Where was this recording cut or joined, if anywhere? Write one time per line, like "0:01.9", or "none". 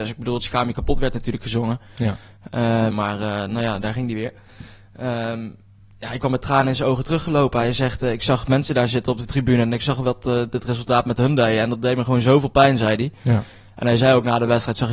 0:02.9

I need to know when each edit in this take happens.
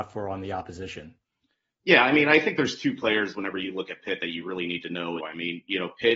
0:05.2

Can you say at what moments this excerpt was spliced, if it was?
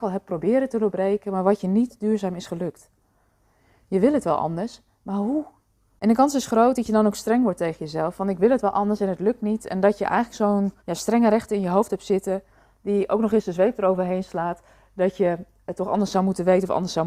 0:10.8

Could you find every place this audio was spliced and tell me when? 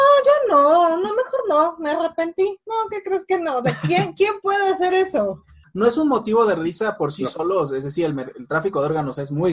0:05.6

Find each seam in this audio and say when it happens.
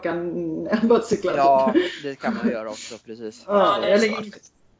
none

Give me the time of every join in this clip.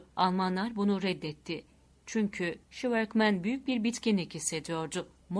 none

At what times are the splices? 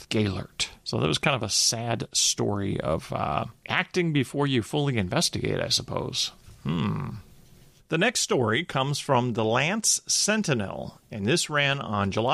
none

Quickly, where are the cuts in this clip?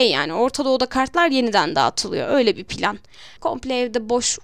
0:03.4

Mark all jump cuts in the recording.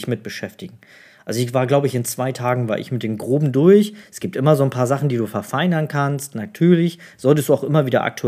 none

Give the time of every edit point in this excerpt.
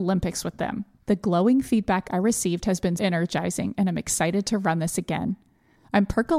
0:01.0
0:03.0

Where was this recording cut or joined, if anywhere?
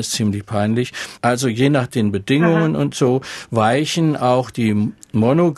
0:01.2

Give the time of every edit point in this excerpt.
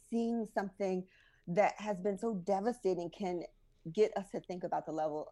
none

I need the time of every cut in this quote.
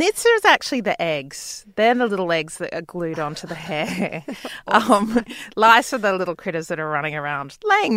none

